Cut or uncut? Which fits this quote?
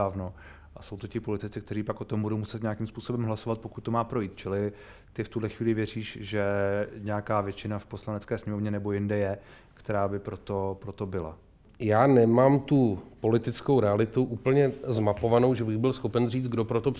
uncut